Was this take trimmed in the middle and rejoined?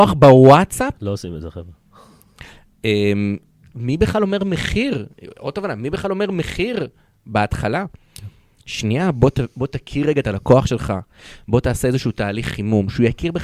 yes; 1 cut; at 3.7 s

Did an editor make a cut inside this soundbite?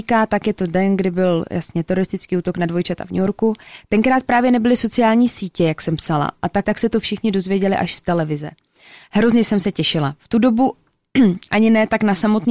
yes; 2 cuts; at 6.6 s, 9.0 s

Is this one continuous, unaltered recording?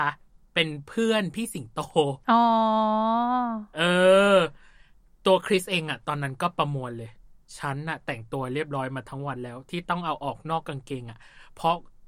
yes; 0 cuts

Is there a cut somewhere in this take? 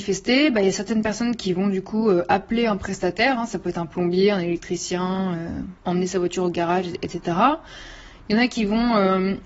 yes; 1 cut; at 5.8 s

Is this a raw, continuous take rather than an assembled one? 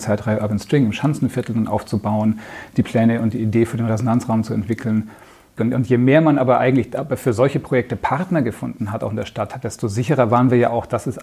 no; 1 cut; at 5.6 s

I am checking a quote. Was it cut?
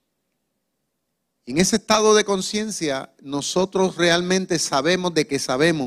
no; 0 cuts

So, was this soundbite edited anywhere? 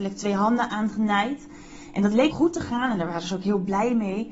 yes; 1 cut; at 2.3 s

